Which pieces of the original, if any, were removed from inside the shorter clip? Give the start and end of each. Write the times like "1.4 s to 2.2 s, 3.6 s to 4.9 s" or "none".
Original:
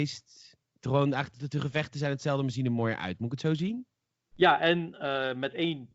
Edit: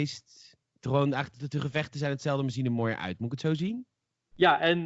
none